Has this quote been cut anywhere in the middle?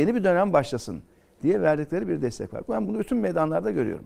no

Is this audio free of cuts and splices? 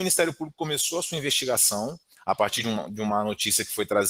yes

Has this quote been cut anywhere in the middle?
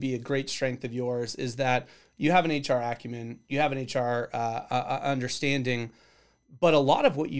no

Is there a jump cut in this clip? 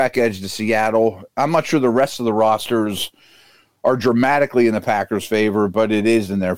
no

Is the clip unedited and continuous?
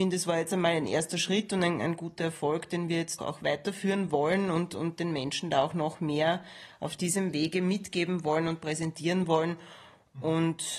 no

